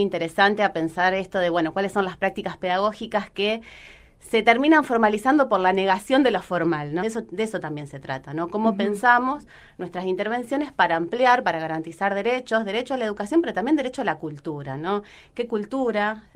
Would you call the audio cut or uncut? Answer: cut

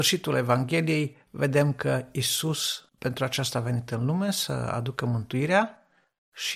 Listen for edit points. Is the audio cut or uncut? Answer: cut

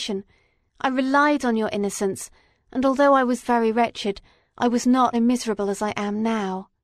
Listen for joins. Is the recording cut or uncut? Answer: cut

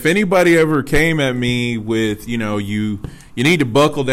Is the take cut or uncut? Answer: uncut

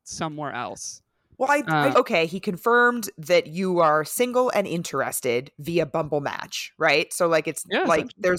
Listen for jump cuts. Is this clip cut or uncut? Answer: cut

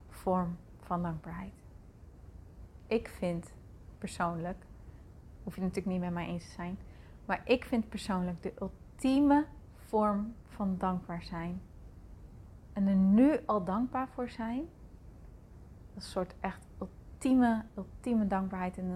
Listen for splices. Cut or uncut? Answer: cut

